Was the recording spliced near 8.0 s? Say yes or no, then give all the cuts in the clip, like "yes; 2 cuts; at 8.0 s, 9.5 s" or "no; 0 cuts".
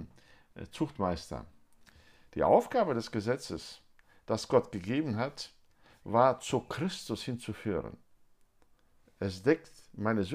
no; 0 cuts